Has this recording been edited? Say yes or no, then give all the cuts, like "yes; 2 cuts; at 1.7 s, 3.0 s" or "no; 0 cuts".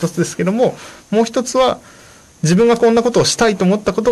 no; 0 cuts